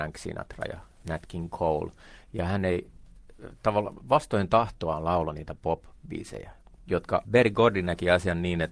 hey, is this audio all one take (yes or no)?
no